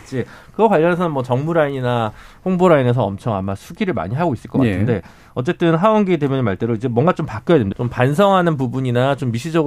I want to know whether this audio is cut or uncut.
cut